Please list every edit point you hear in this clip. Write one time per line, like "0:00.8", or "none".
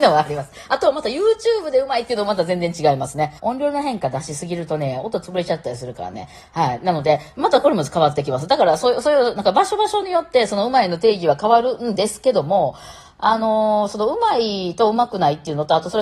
0:03.4